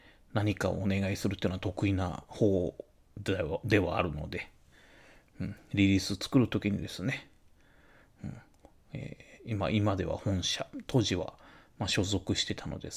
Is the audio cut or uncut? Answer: uncut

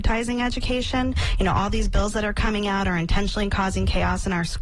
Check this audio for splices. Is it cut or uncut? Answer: uncut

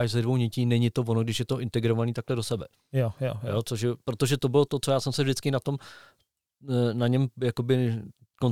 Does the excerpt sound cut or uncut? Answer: uncut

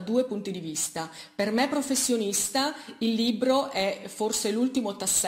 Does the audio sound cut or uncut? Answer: uncut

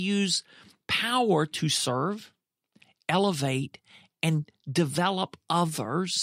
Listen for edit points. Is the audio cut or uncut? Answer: uncut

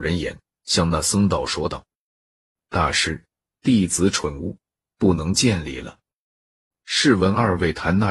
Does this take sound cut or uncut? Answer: uncut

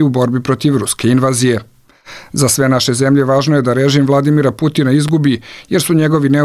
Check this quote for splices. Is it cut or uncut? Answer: uncut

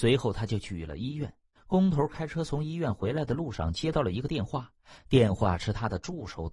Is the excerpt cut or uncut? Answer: cut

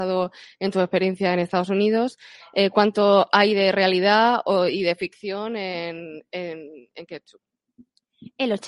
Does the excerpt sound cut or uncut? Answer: uncut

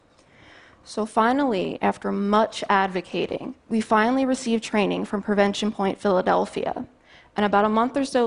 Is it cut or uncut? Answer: cut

